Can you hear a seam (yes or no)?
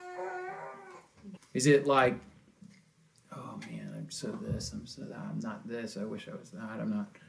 yes